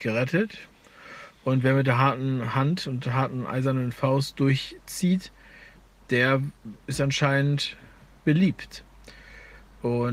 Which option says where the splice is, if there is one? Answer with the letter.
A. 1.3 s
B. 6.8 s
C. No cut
B